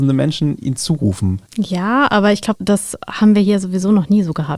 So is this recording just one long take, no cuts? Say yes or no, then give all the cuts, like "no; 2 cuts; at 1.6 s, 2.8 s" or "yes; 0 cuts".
no; 2 cuts; at 1.5 s, 2.6 s